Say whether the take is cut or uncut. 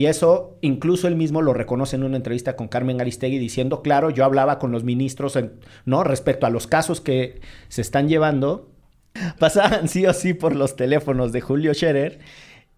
uncut